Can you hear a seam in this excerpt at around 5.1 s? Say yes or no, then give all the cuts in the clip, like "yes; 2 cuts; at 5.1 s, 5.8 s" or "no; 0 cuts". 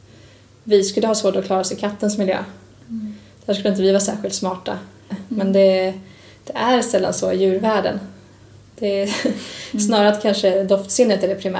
yes; 1 cut; at 5.1 s